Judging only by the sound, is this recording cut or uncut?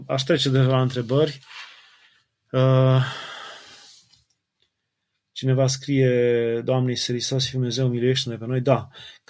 uncut